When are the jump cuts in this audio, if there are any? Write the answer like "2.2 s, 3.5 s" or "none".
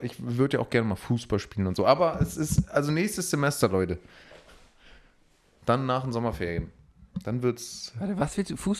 none